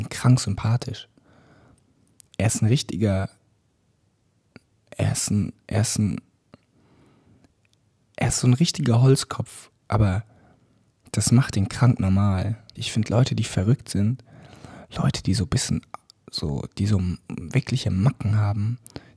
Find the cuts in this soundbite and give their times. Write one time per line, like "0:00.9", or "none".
0:12.8